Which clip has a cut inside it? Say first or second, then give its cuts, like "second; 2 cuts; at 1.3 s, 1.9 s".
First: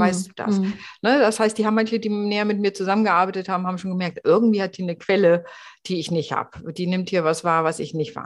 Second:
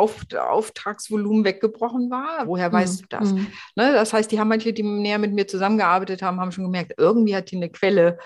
second; 1 cut; at 2.4 s